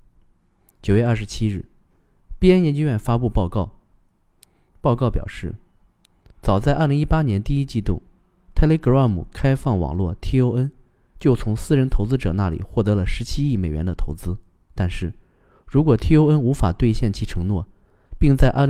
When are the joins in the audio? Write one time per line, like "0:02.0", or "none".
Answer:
none